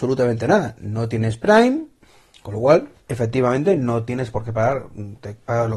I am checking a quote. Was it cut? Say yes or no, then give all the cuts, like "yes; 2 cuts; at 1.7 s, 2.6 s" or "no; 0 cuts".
yes; 1 cut; at 3.0 s